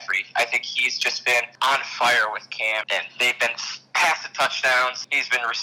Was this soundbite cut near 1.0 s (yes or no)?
no